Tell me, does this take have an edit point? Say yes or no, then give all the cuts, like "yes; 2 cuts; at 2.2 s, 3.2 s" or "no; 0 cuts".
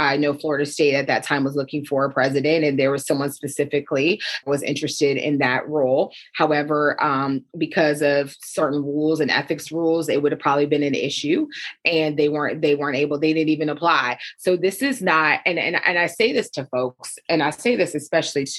no; 0 cuts